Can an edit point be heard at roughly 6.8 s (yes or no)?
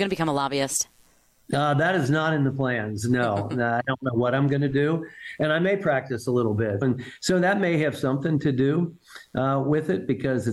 yes